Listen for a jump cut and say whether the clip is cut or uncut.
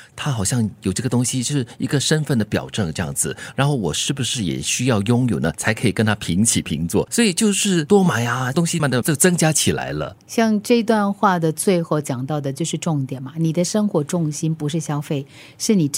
cut